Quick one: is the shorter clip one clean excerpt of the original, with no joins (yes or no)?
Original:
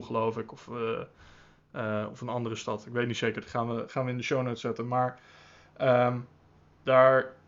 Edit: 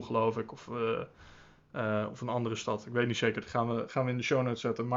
yes